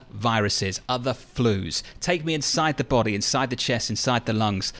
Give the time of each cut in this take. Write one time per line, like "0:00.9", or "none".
none